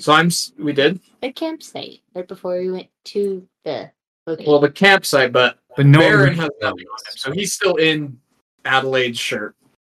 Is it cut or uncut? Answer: uncut